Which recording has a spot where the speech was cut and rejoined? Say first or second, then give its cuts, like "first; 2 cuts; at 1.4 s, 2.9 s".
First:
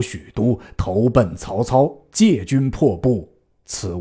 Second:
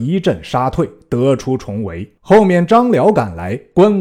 second; 1 cut; at 2.2 s